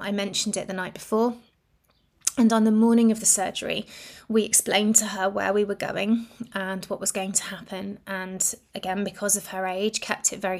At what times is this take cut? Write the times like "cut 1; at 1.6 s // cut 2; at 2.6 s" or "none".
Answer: none